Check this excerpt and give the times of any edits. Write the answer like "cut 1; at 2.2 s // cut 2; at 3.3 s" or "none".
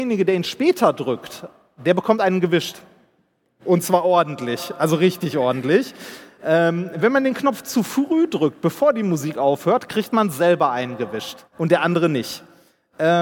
cut 1; at 11.5 s